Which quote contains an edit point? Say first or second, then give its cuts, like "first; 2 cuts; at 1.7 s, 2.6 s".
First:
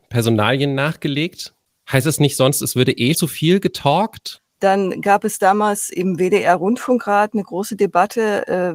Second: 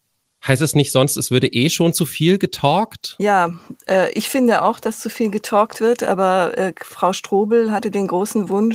first; 3 cuts; at 1.7 s, 3.1 s, 4.4 s